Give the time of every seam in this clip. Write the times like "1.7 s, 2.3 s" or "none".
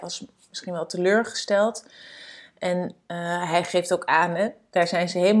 none